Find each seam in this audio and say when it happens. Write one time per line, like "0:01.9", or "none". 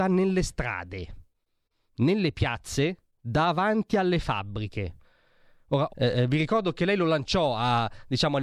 0:05.9